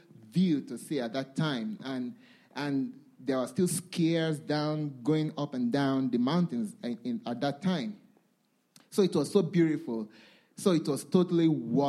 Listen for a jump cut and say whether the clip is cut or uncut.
uncut